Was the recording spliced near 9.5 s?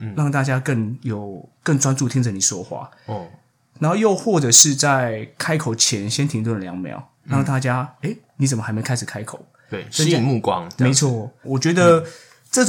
no; 1 cut; at 11.4 s

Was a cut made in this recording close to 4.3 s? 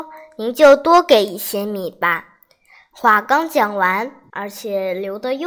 yes; 1 cut; at 4.3 s

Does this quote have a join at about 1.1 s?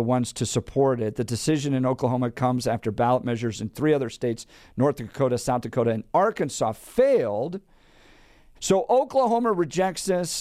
no; 1 cut; at 8.6 s

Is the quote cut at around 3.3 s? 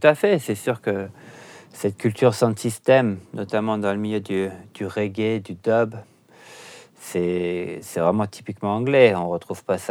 no; 0 cuts

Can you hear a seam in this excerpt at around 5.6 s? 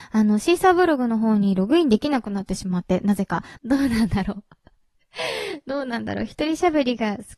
no; 1 cut; at 3.6 s

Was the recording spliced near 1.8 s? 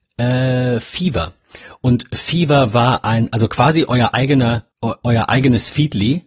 no; 1 cut; at 4.7 s

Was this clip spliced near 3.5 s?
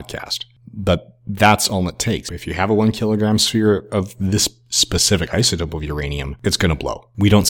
no; 1 cut; at 2.3 s

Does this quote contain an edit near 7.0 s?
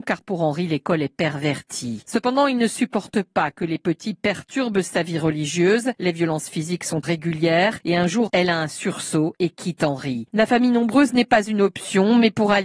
yes; 3 cuts; at 7.0 s, 8.3 s, 10.3 s

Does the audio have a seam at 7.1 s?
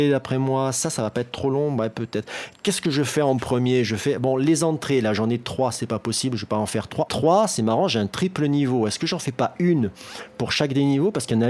yes; 1 cut; at 7.1 s

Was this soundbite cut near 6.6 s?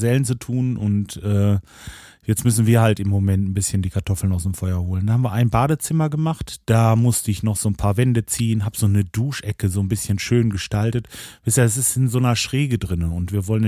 yes; 1 cut; at 6.6 s

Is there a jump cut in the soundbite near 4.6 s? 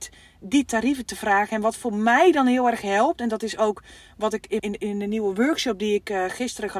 yes; 1 cut; at 4.6 s

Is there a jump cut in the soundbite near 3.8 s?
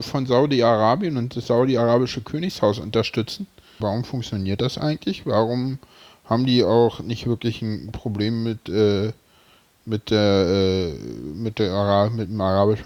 yes; 1 cut; at 3.8 s

